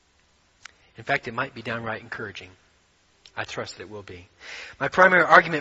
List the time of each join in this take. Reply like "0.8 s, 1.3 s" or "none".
none